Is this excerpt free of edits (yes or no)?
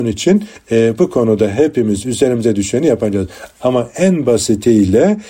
yes